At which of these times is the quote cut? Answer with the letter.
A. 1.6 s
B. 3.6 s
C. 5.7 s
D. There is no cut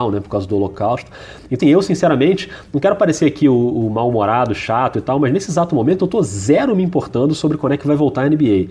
A